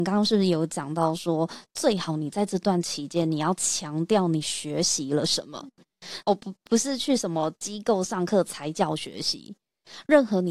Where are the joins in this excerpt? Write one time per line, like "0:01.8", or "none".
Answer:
0:06.2